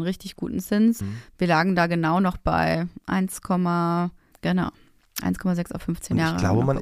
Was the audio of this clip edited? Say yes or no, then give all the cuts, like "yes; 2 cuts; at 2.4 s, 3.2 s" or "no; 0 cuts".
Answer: yes; 2 cuts; at 1.0 s, 4.3 s